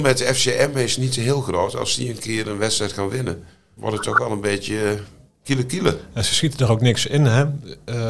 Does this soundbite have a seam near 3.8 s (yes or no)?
yes